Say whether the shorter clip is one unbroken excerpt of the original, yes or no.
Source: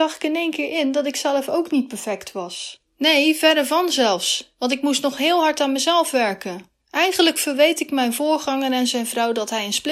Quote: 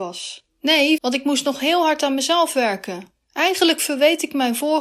no